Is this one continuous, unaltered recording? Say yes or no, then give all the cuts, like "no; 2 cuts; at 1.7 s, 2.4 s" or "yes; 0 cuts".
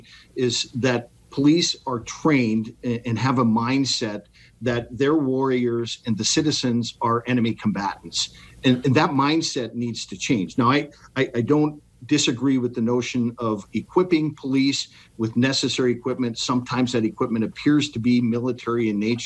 yes; 0 cuts